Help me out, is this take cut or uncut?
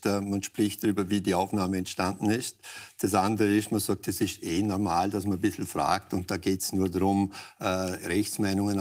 uncut